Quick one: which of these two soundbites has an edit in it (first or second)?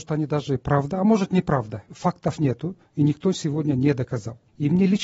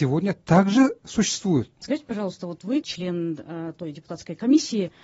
second